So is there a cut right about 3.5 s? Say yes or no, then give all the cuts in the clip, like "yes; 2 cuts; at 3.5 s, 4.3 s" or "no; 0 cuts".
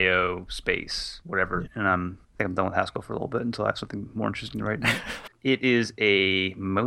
no; 2 cuts; at 1.7 s, 5.3 s